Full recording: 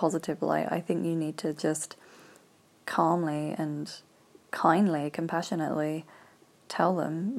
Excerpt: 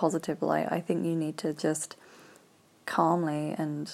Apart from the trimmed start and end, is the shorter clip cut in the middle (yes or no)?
no